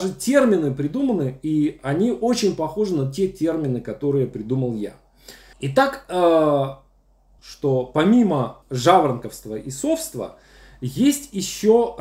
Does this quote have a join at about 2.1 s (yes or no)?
no